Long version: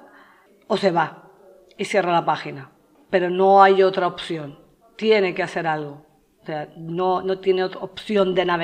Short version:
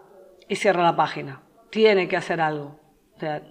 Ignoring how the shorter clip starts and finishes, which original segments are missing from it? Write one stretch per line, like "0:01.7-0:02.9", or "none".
0:02.9-0:04.8